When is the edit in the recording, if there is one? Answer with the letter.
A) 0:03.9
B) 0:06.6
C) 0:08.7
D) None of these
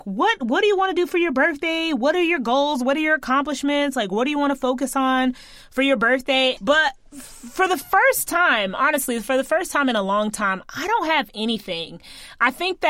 B